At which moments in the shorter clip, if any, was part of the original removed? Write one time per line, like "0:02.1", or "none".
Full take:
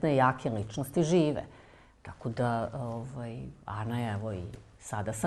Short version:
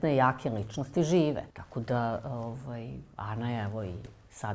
0:01.5